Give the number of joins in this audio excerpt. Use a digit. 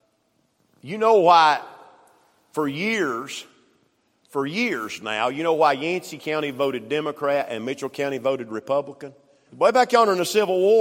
1